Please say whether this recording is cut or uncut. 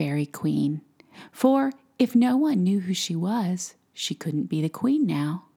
uncut